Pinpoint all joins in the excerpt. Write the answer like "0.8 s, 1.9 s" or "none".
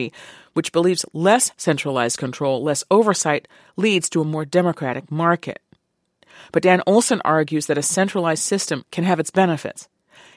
none